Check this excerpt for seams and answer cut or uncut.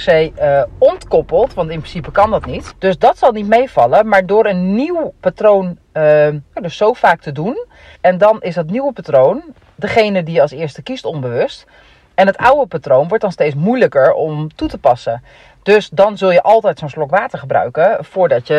cut